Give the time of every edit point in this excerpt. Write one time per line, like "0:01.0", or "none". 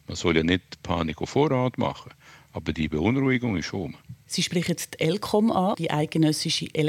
0:05.7

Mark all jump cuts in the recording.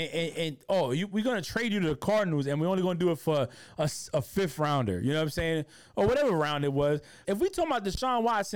0:07.2

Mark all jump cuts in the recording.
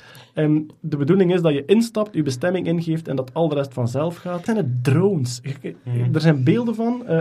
0:04.5

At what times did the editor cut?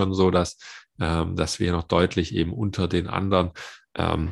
none

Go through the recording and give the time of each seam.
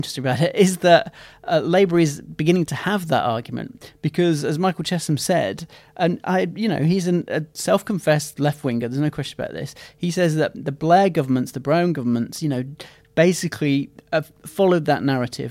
none

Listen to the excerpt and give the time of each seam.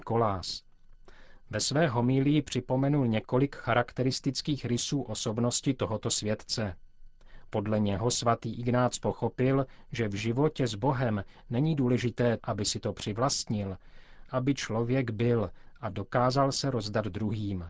0:12.4
0:14.3

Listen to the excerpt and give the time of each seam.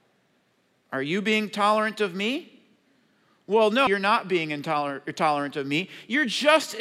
0:03.9

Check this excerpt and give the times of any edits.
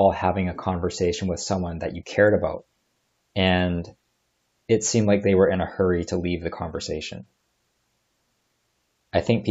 none

